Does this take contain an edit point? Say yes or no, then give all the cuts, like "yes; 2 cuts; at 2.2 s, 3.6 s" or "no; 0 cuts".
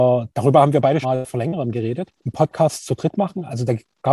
yes; 2 cuts; at 1.0 s, 2.2 s